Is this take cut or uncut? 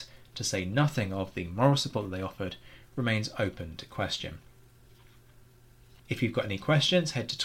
cut